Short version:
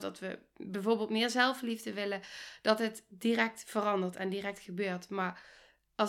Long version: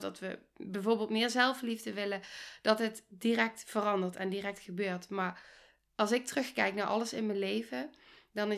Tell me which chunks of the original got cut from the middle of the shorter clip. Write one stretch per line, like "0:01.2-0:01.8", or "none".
none